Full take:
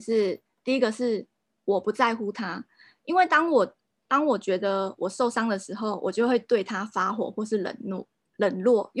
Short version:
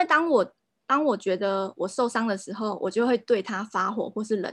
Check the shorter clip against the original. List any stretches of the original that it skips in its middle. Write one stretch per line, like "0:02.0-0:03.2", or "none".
none